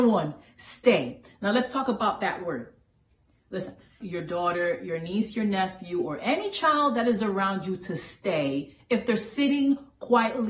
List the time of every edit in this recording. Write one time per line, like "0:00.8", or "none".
0:04.0